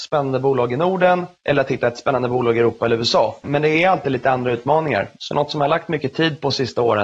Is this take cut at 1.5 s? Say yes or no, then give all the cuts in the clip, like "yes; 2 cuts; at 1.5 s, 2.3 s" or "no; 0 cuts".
no; 2 cuts; at 3.4 s, 5.2 s